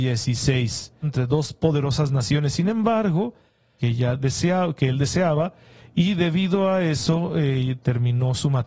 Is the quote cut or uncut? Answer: cut